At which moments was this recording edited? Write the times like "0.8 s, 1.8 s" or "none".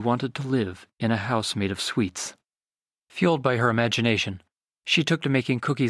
3.0 s